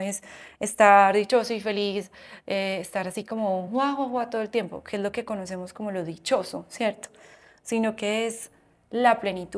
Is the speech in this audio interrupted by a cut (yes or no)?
no